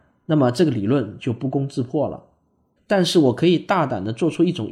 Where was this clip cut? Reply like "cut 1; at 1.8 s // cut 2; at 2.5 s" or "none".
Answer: cut 1; at 2.8 s